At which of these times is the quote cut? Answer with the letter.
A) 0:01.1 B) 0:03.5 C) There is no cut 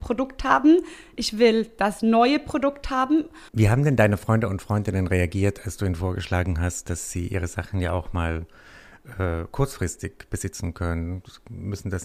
B